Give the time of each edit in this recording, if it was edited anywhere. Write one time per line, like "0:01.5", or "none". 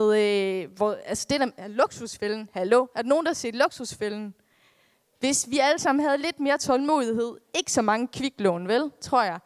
none

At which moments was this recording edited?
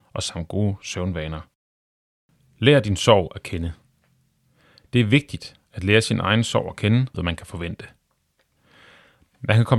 0:07.1

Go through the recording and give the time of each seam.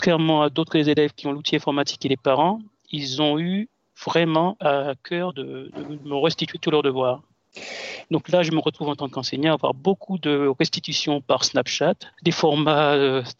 0:08.0
0:12.1

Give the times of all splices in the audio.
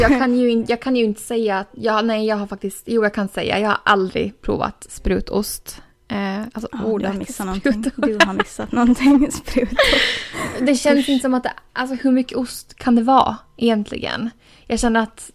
none

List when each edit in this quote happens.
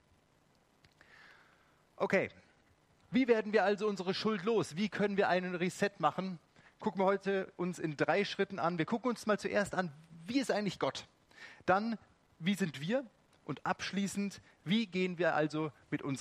none

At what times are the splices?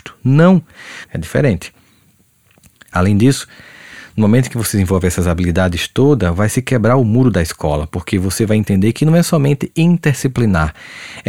0:01.1

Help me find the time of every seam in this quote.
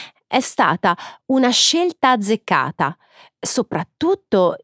none

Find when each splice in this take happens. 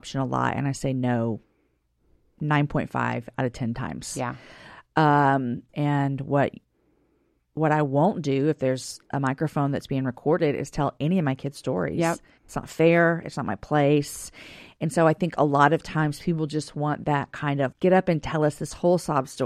0:05.7
0:17.7

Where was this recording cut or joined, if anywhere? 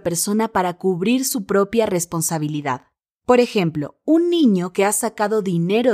none

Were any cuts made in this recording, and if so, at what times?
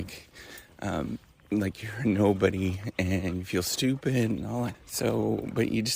0:04.7

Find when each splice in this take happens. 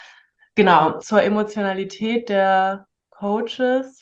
0:01.0

